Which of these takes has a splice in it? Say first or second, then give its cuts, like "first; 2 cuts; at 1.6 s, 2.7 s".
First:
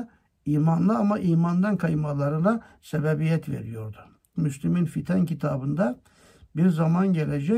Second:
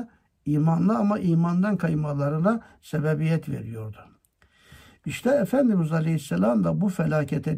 first; 1 cut; at 4.3 s